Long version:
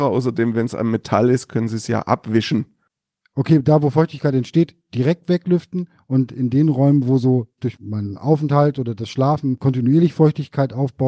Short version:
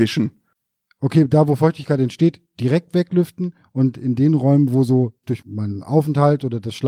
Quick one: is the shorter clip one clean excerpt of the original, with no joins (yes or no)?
yes